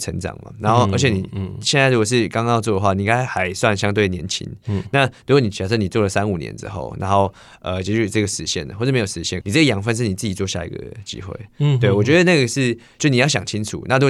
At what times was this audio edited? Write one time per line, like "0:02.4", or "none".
0:09.4